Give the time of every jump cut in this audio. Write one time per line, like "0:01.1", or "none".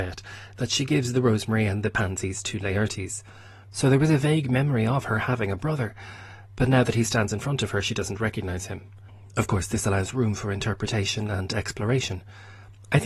0:03.6
0:09.3